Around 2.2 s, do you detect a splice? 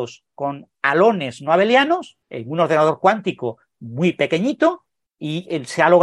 yes; 1 cut; at 2.2 s

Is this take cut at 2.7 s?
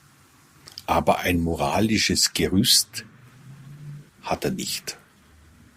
no; 1 cut; at 4.1 s

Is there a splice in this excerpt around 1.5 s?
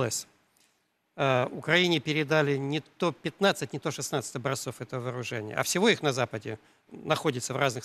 no; 1 cut; at 6.9 s

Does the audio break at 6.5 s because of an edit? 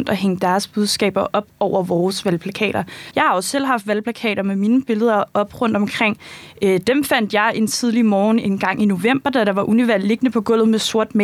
no; 1 cut; at 3.1 s

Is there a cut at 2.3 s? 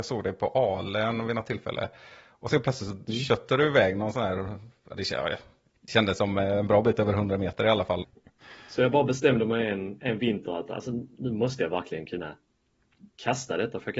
no; 1 cut; at 8.0 s

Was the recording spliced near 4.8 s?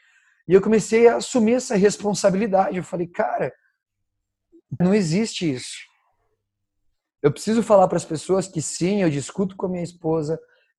yes; 1 cut; at 4.8 s

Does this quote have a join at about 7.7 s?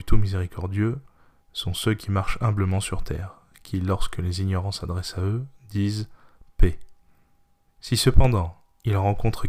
yes; 1 cut; at 7.7 s

